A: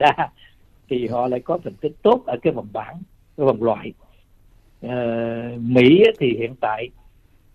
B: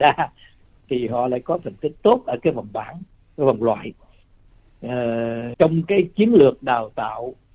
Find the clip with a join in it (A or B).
B